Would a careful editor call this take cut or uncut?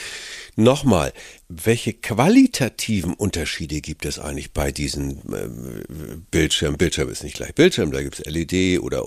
uncut